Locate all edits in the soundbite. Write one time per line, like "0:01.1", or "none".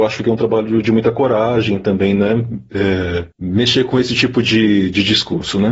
0:03.3